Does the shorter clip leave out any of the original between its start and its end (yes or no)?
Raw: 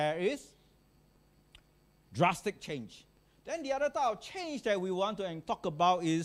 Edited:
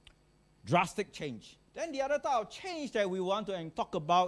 yes